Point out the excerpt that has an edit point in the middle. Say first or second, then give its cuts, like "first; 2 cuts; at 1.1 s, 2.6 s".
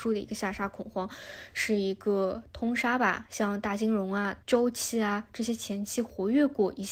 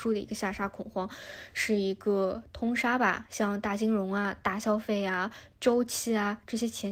first; 1 cut; at 4.4 s